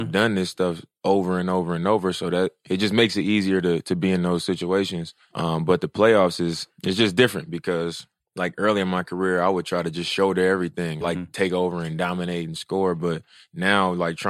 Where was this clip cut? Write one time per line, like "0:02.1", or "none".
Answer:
0:11.0